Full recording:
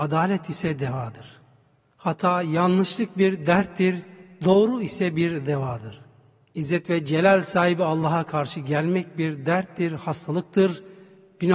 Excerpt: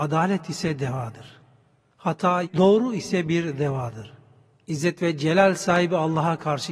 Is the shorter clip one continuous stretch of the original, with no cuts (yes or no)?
no